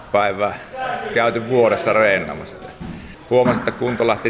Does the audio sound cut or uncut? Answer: cut